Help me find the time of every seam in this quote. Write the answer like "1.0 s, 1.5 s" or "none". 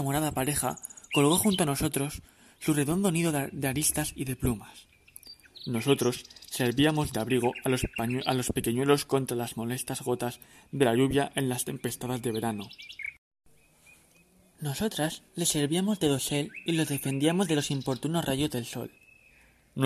none